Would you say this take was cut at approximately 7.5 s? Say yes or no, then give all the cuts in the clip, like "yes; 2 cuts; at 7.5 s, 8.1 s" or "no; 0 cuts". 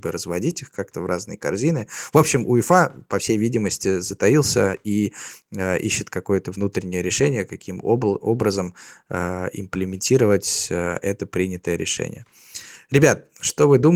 no; 0 cuts